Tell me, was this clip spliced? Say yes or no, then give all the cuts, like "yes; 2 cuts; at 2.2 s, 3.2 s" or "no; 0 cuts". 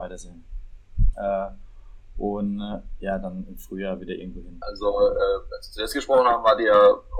yes; 2 cuts; at 1.1 s, 4.6 s